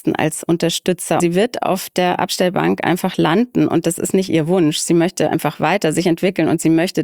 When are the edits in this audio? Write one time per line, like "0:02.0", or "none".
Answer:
0:01.2